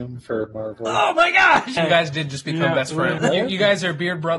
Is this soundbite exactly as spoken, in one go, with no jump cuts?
no; 2 cuts; at 1.8 s, 3.2 s

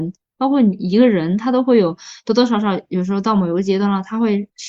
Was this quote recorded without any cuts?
yes; 0 cuts

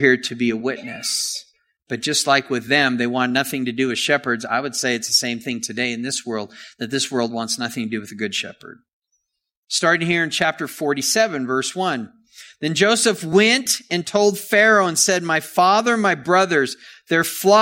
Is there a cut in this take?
no; 0 cuts

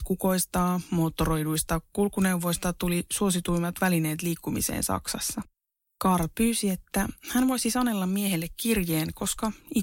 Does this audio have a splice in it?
yes; 1 cut; at 5.9 s

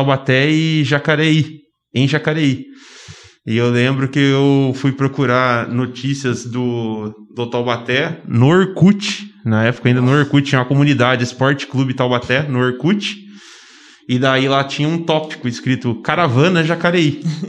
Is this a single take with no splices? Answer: yes; 0 cuts

